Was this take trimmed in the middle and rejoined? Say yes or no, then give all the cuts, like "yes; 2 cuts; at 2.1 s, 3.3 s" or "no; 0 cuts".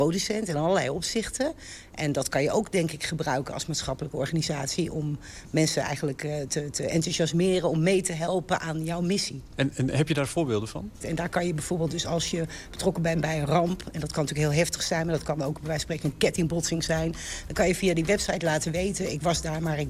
yes; 2 cuts; at 9.5 s, 11.0 s